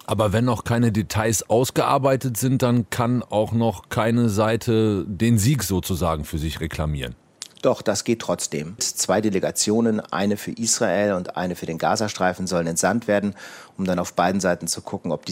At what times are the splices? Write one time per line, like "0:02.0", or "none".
0:08.8